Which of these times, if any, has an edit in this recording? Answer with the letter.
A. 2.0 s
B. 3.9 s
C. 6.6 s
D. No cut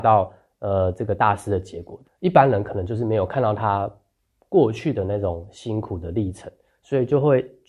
A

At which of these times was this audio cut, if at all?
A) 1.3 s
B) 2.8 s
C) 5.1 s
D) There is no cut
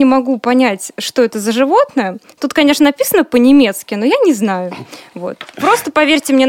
D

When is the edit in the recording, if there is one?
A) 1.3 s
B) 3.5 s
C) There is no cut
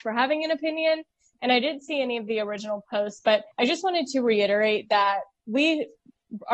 B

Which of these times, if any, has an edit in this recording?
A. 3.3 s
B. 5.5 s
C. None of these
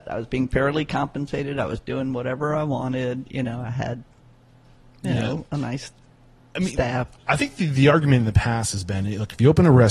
C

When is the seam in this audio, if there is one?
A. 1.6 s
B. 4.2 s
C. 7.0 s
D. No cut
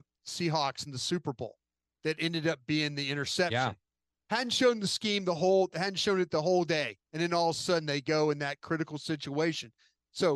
C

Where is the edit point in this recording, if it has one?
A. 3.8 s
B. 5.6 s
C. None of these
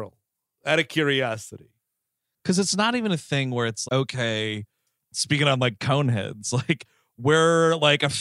A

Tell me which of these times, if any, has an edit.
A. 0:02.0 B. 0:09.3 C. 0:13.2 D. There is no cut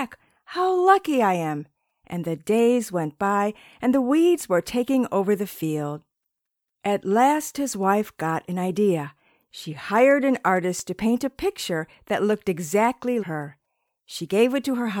C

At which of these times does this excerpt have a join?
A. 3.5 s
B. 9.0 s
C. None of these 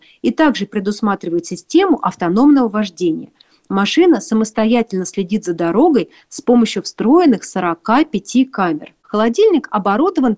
B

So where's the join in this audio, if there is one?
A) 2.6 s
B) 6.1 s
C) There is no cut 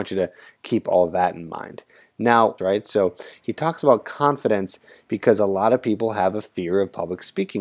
A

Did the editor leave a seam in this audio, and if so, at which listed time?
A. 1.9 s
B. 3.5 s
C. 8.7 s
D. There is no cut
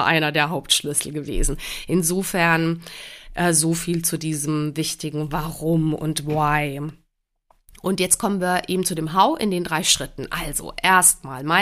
D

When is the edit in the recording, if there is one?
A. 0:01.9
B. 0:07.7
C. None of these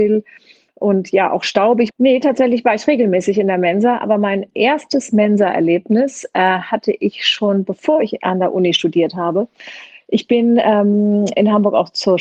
A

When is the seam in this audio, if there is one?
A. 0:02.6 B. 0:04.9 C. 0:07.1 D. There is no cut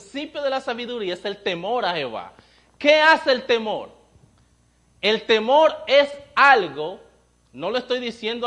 D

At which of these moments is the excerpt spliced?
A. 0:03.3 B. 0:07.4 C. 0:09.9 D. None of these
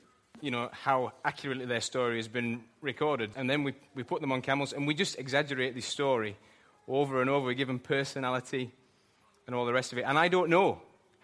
A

